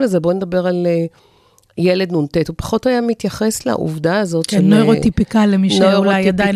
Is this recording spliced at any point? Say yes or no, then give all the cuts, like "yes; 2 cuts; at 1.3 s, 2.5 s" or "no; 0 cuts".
no; 0 cuts